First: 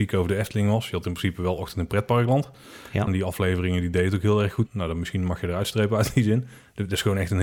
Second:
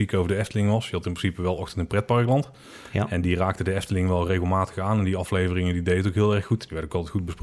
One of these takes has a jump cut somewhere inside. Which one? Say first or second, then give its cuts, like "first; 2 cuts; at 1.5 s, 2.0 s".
first; 2 cuts; at 3.1 s, 4.7 s